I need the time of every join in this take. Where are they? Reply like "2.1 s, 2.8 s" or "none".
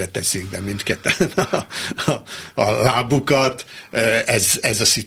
none